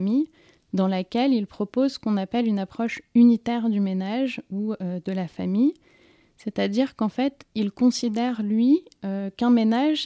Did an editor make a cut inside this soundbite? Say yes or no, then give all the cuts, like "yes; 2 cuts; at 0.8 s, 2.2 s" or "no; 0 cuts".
no; 0 cuts